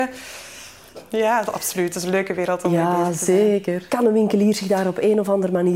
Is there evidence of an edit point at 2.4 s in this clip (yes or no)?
no